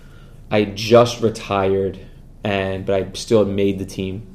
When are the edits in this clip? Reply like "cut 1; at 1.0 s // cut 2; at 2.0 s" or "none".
none